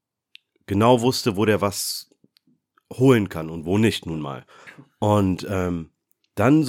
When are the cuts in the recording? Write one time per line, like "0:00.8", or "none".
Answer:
none